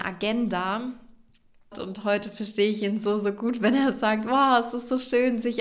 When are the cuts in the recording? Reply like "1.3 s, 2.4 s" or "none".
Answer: 1.7 s